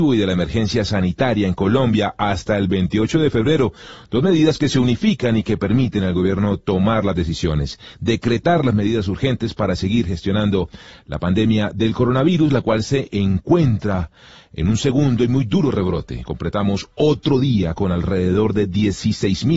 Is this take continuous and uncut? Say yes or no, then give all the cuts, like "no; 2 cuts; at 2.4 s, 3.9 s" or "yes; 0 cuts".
yes; 0 cuts